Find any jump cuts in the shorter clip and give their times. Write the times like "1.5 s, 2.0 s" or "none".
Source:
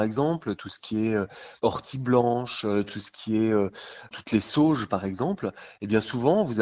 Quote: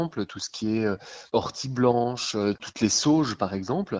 2.6 s